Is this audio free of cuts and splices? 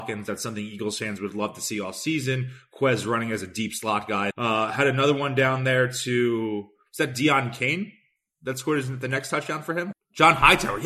no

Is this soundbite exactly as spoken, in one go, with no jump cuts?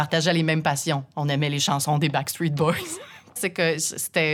no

